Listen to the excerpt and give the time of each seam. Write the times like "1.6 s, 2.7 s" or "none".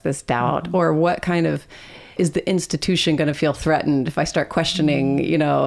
2.2 s